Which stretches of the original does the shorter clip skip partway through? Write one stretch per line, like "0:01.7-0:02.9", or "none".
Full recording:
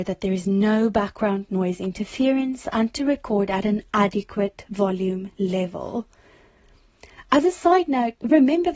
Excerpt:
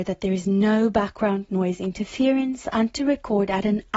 none